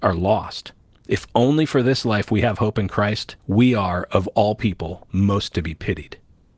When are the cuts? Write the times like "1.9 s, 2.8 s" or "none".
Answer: 3.4 s

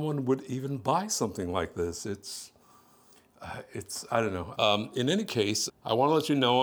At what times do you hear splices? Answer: 4.5 s, 5.7 s

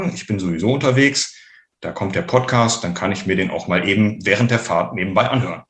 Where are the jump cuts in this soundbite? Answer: none

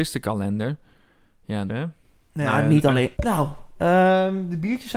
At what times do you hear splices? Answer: 1.7 s, 3.1 s

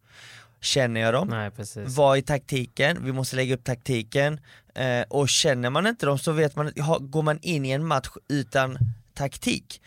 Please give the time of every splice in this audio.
none

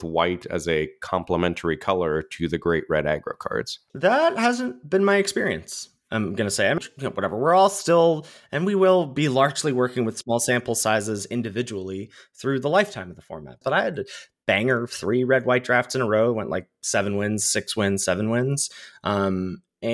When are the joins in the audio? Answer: 6.8 s, 13.6 s

